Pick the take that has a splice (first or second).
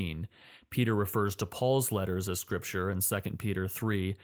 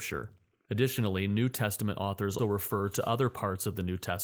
second